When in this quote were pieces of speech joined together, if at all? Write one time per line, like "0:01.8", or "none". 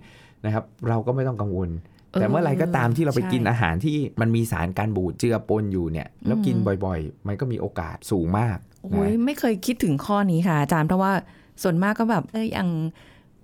0:12.3